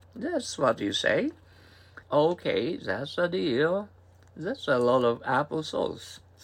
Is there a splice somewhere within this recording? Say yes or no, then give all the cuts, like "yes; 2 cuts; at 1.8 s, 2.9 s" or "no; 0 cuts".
yes; 1 cut; at 2.0 s